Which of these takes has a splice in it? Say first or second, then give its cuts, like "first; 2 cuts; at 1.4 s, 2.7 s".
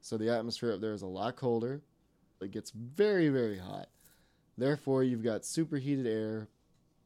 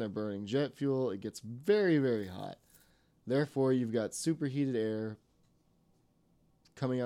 first; 1 cut; at 2.4 s